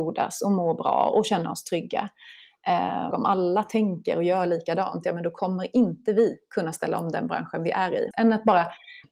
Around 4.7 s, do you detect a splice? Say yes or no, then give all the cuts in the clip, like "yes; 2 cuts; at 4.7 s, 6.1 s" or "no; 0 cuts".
no; 2 cuts; at 3.1 s, 8.1 s